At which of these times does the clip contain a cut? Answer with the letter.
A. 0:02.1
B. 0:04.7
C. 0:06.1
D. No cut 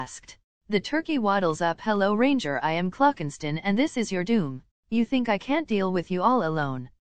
B